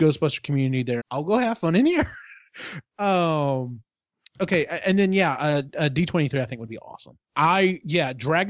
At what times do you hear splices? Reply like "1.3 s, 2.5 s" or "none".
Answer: 1.0 s, 7.2 s